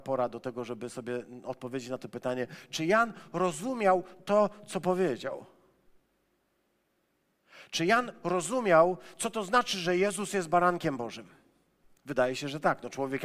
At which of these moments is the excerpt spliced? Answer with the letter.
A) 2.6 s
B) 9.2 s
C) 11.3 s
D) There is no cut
D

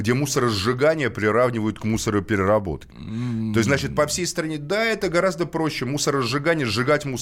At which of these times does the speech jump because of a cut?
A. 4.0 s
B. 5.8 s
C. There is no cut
C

